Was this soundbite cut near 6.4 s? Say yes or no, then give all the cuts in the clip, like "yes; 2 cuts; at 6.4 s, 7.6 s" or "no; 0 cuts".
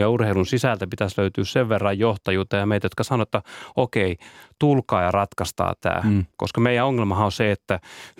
yes; 1 cut; at 6.4 s